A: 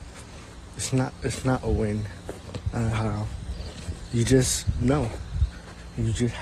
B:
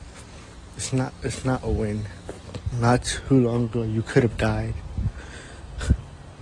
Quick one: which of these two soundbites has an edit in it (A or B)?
B